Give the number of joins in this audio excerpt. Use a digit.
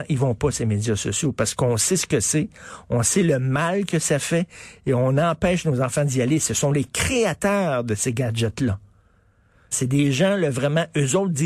1